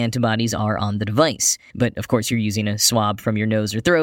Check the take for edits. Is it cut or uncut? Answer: cut